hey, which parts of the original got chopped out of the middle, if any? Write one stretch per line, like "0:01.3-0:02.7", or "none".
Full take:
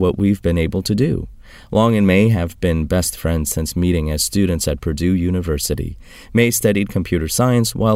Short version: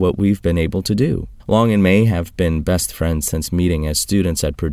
0:01.4-0:01.6

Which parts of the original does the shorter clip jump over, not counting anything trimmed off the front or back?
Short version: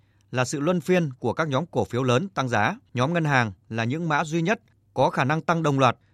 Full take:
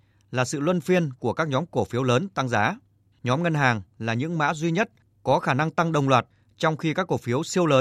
0:02.9-0:03.2

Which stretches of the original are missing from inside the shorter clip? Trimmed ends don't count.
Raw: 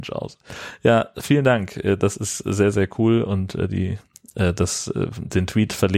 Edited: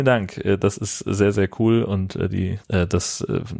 0:04.0-0:04.3

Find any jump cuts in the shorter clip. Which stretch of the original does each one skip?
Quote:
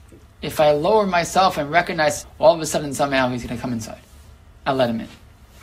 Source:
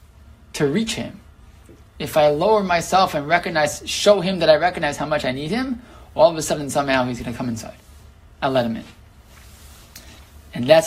0:03.8-0:06.0

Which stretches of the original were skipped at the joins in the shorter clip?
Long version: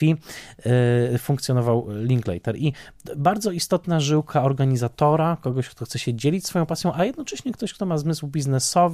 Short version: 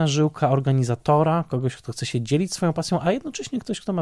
none

